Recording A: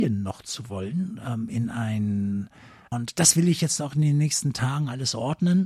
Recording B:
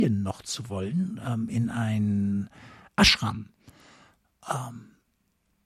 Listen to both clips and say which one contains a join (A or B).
A